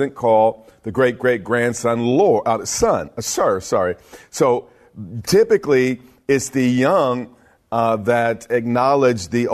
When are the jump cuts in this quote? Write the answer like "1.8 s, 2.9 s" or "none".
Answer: none